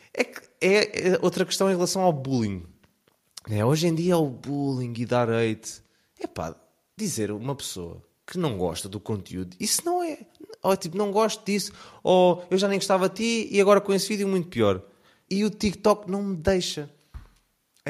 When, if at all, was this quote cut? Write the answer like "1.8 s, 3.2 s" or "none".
15.3 s